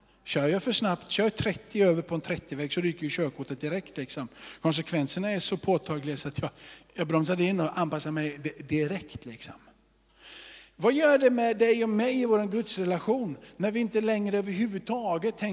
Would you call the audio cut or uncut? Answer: uncut